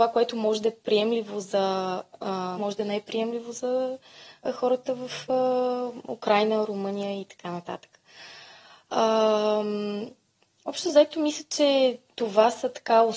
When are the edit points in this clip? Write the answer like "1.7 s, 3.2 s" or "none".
2.6 s